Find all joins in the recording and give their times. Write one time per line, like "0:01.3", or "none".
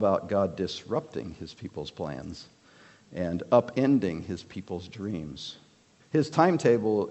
0:06.0